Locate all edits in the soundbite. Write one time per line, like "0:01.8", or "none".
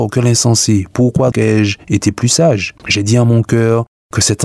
0:01.3
0:02.8

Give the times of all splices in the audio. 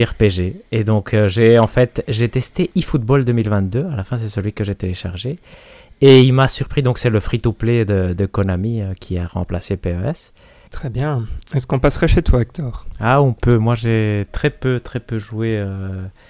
0:10.7

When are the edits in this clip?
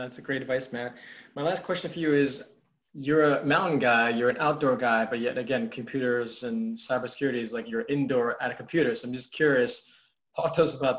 none

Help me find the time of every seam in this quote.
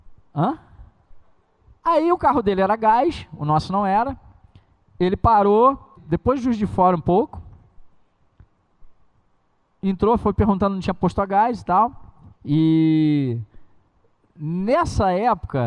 0:01.8
0:06.0
0:12.3

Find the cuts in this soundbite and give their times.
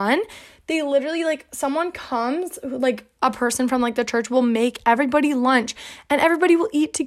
none

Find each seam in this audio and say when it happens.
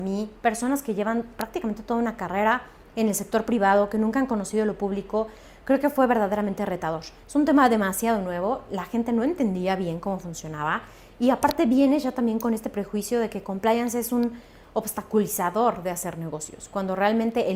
0:07.2

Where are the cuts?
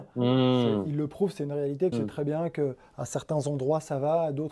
0:01.9

